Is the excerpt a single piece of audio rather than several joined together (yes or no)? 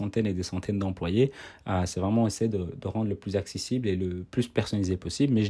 yes